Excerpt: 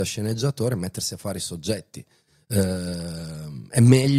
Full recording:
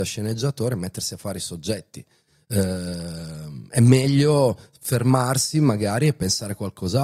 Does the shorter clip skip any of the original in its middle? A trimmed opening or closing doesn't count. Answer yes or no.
no